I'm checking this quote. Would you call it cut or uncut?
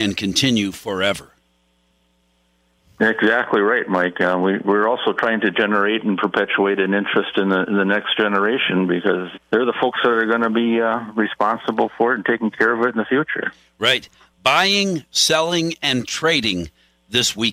cut